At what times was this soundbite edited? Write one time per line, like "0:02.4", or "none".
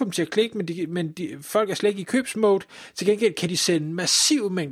none